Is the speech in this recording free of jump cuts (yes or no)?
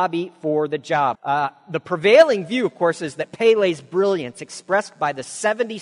no